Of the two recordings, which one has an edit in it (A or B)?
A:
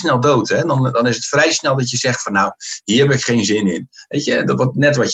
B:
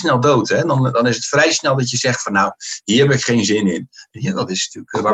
B